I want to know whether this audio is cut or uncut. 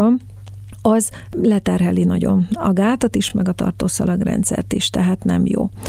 uncut